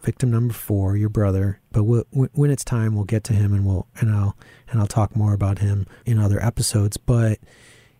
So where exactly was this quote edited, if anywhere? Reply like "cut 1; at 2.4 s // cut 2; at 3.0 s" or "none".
cut 1; at 1.7 s // cut 2; at 6.0 s